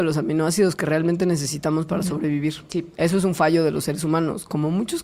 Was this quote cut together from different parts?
no; 0 cuts

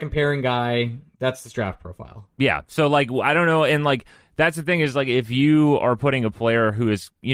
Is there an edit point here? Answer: no; 0 cuts

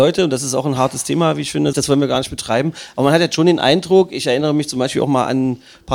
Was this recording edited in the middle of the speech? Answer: yes; 1 cut; at 1.7 s

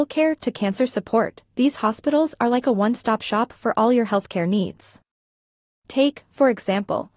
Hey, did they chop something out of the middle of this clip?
no; 0 cuts

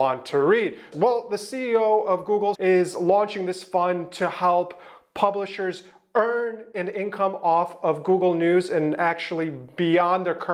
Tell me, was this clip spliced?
yes; 2 cuts; at 0.9 s, 2.5 s

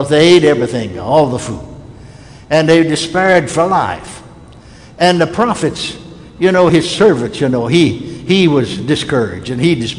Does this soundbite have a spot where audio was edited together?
no; 0 cuts

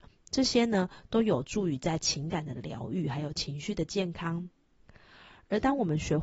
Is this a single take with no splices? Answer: yes; 0 cuts

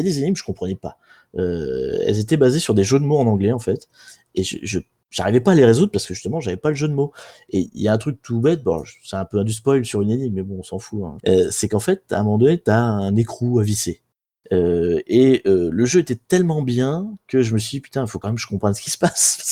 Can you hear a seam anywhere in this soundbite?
yes; 2 cuts; at 11.2 s, 14.4 s

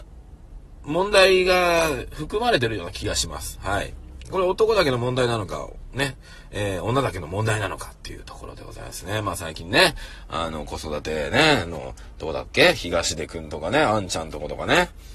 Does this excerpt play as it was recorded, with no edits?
yes; 0 cuts

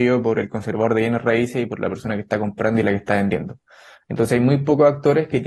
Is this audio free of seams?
yes; 0 cuts

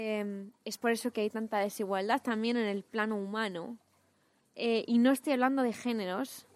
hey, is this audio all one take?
no; 1 cut; at 4.4 s

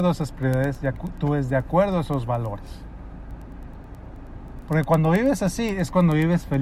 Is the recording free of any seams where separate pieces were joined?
no; 1 cut; at 4.6 s

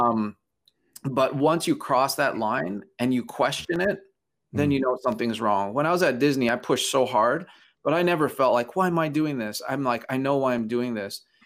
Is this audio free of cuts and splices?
yes; 0 cuts

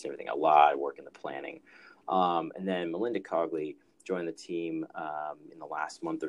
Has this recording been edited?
no; 0 cuts

